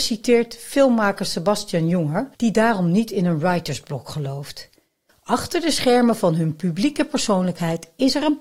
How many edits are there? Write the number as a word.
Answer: two